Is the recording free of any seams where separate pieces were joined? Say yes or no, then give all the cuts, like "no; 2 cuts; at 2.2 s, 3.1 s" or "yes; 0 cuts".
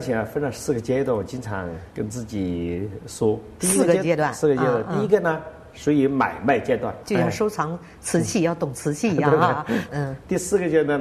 no; 2 cuts; at 7.0 s, 9.9 s